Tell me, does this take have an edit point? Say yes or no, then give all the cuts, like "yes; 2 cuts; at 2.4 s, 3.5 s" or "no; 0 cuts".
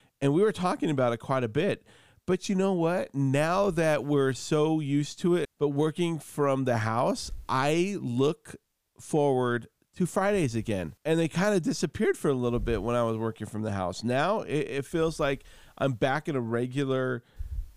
yes; 2 cuts; at 5.4 s, 11.0 s